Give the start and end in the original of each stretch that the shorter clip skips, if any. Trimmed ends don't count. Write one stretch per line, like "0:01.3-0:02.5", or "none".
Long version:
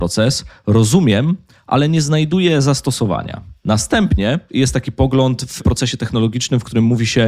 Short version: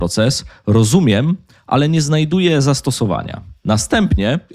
none